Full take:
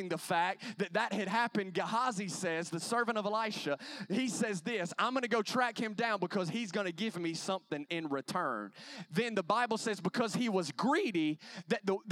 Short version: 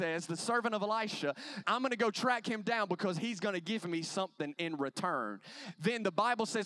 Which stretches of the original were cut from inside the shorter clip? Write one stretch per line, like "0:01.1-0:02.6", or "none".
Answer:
0:04.1-0:05.0